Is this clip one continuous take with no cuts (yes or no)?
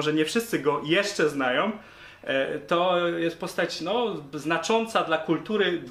yes